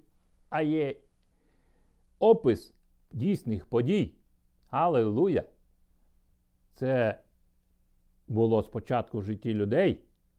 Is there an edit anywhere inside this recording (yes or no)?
no